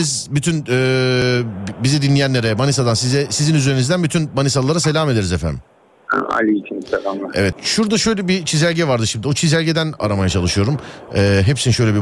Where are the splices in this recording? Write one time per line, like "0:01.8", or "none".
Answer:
0:07.5